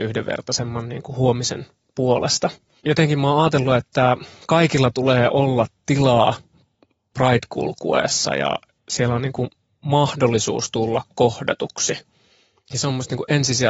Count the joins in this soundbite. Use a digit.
0